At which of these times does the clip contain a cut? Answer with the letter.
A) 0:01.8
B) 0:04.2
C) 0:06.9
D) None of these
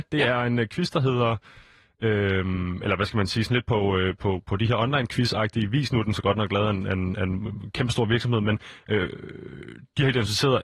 B